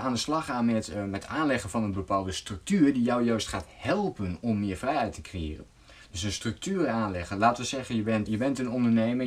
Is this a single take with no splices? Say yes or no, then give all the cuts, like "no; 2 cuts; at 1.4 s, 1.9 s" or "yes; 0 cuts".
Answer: no; 1 cut; at 8.3 s